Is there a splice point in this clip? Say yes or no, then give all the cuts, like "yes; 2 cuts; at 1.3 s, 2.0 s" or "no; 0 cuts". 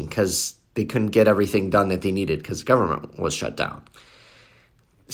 no; 0 cuts